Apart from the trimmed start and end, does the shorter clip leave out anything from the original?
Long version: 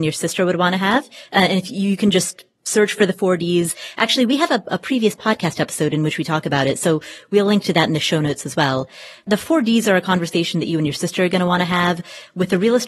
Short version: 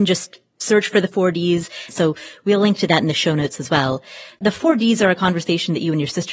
yes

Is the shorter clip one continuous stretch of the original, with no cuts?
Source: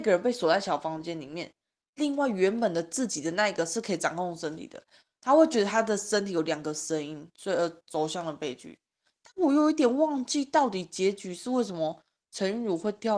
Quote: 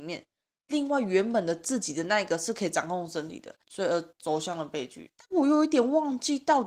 no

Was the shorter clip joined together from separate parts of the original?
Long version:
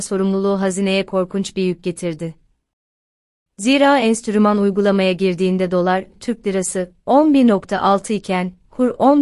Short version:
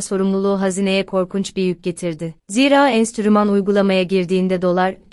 yes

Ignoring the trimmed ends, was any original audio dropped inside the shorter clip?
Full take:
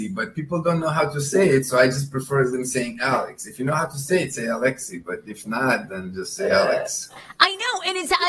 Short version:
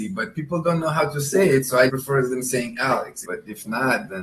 yes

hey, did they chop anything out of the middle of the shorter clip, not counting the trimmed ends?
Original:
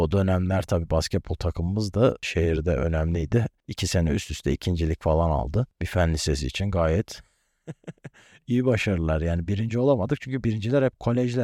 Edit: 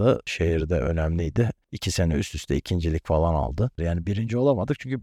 yes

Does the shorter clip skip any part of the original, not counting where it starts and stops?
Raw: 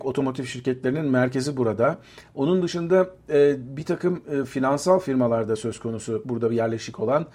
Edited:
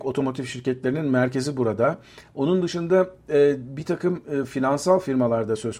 no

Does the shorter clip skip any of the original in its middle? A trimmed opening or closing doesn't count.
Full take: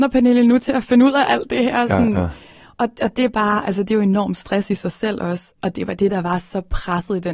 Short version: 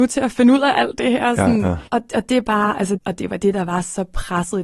yes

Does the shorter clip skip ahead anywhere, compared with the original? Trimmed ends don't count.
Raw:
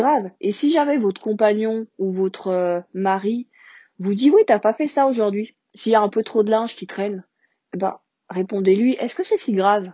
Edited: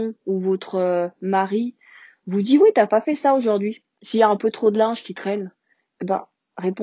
no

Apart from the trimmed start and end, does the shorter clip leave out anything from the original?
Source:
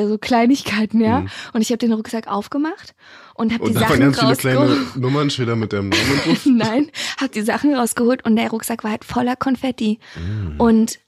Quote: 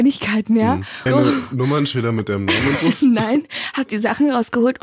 yes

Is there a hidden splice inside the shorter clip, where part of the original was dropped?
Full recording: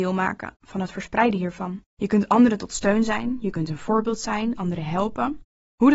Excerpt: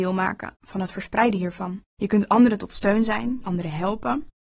yes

